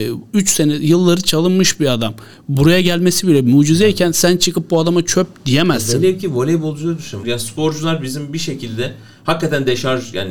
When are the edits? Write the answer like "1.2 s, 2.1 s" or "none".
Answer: 7.2 s